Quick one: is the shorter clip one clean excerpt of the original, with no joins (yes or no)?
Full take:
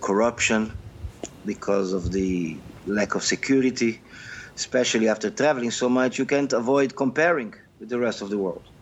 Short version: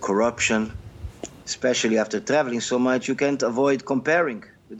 no